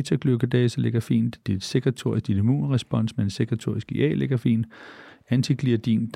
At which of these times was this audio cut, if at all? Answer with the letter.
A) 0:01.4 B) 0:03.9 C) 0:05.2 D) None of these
A